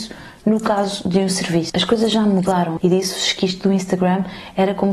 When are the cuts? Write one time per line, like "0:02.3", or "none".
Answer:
0:01.7
0:02.8